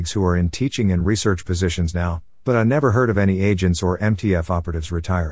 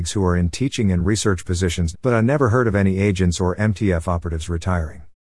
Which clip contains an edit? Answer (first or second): second